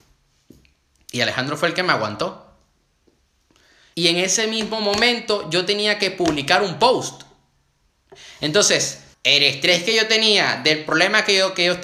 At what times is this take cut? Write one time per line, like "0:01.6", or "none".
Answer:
0:03.9
0:09.1